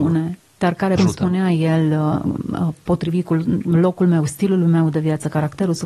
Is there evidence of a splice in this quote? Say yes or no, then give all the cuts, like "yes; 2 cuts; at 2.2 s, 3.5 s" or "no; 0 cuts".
yes; 1 cut; at 1.0 s